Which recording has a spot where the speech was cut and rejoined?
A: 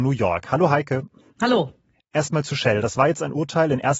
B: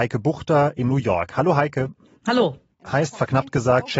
B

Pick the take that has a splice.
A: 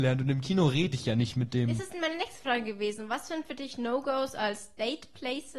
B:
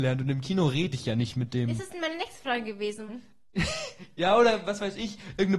B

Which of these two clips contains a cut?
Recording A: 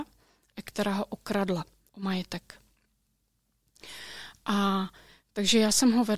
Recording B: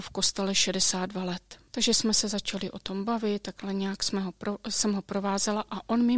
B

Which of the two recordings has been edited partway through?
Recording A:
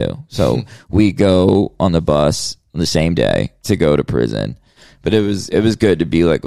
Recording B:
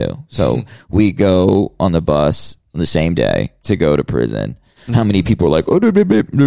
B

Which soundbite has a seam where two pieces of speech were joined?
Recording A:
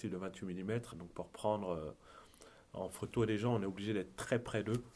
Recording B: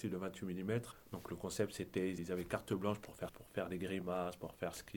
B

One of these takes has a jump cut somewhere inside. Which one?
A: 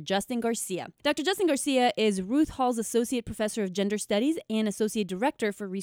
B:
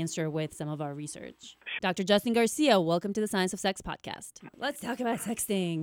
B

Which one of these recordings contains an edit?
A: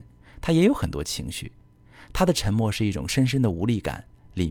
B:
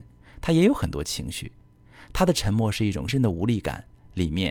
B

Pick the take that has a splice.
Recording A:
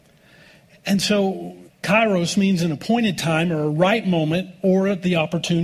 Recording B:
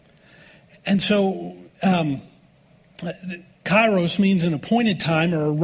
A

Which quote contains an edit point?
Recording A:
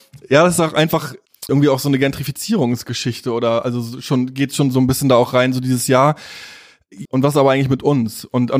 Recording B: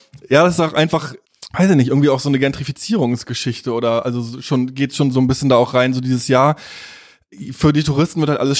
A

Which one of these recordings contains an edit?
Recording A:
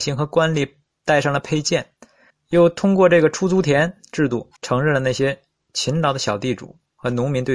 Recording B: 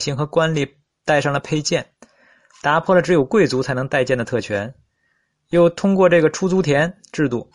A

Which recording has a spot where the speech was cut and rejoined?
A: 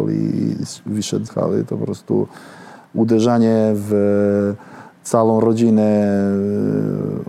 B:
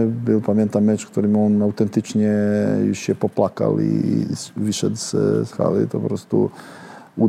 A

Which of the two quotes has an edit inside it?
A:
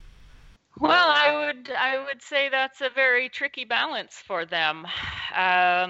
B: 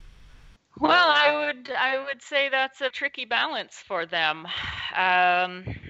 B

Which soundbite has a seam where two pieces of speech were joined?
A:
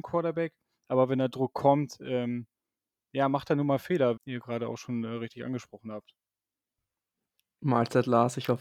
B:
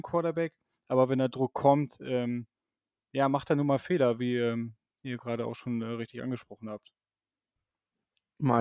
A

